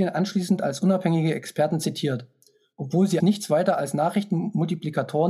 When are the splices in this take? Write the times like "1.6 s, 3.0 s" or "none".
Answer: 3.2 s